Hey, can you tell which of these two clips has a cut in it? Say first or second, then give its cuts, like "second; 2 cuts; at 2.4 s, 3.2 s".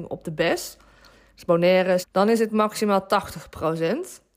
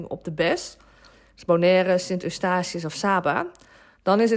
first; 1 cut; at 2.0 s